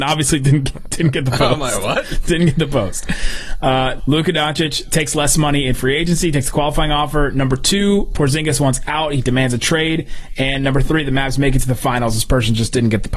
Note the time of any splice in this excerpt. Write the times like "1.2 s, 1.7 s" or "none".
4.0 s